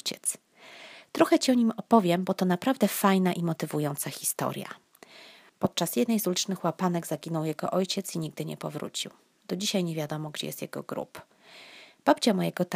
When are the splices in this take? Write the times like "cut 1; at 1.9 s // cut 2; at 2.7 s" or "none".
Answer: cut 1; at 5.5 s